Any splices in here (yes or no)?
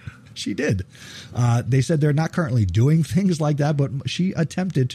no